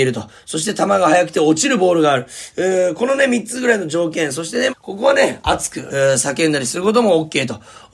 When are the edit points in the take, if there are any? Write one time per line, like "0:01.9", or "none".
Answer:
0:04.7
0:05.9